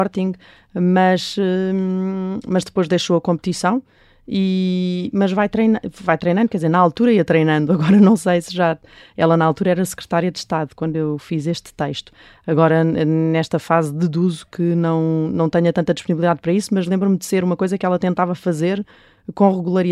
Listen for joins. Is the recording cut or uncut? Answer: uncut